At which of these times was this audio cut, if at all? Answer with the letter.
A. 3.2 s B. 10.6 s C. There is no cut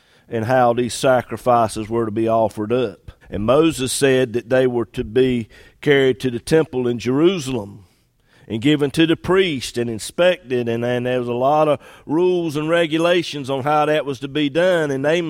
A